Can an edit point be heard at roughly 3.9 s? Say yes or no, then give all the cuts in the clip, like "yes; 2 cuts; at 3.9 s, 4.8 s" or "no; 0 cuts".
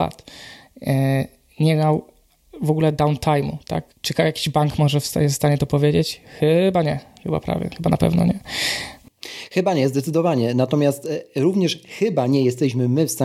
yes; 1 cut; at 3.9 s